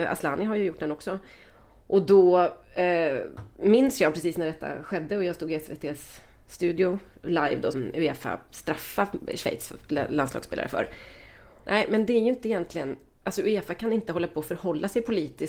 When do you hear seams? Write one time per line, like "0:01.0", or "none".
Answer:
0:07.7
0:11.6